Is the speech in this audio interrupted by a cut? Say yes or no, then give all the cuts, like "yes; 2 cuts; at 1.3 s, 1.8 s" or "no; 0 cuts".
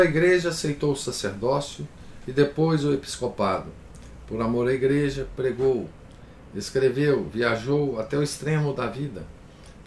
no; 0 cuts